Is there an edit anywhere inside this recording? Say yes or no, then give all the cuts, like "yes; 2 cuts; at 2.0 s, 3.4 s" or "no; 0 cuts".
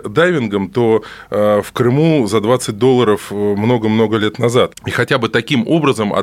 yes; 1 cut; at 4.7 s